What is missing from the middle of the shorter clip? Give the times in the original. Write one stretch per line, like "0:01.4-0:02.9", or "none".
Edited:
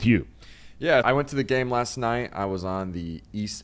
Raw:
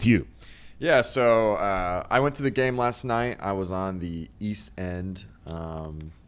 0:01.0-0:02.1